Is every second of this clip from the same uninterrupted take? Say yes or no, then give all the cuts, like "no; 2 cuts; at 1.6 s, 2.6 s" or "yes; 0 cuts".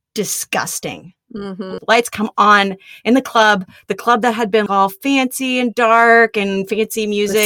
no; 2 cuts; at 1.8 s, 4.7 s